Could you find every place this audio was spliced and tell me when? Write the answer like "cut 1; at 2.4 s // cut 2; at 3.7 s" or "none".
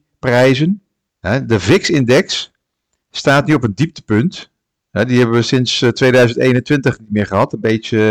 cut 1; at 1.1 s